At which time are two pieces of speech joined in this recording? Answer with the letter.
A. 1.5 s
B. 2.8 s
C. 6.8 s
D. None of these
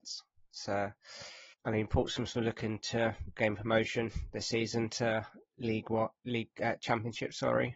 A